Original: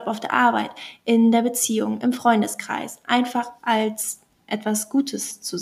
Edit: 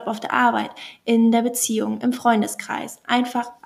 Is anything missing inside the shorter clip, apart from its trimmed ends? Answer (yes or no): no